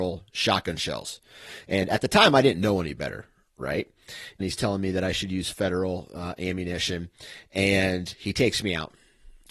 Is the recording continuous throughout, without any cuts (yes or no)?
no